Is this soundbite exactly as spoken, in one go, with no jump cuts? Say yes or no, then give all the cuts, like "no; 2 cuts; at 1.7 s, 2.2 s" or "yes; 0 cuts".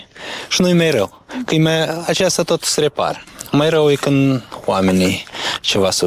yes; 0 cuts